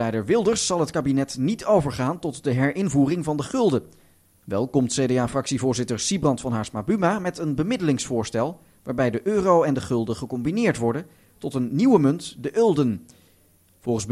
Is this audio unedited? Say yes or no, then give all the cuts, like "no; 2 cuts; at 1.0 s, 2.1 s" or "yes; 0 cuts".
yes; 0 cuts